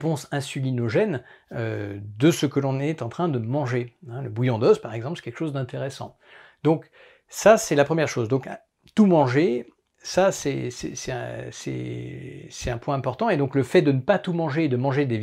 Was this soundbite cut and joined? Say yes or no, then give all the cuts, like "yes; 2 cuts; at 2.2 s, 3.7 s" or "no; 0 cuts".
no; 0 cuts